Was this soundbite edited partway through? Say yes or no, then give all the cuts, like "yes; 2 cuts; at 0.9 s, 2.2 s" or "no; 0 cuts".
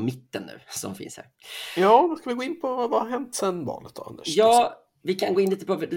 no; 0 cuts